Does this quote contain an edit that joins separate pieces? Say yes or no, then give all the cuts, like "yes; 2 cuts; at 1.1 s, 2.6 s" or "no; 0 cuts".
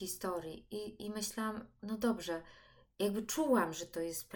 yes; 1 cut; at 1.8 s